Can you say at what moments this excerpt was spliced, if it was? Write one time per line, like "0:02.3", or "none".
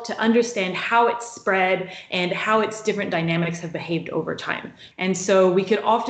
0:04.9